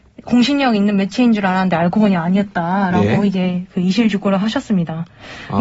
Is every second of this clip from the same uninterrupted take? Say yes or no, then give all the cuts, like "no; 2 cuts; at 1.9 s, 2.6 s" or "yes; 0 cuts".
yes; 0 cuts